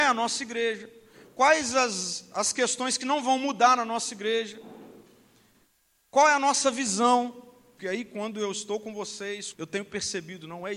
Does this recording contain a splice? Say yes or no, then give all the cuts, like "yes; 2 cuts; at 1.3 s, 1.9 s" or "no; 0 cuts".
yes; 2 cuts; at 7.8 s, 9.5 s